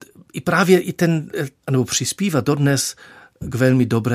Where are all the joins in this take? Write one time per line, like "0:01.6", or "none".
0:01.6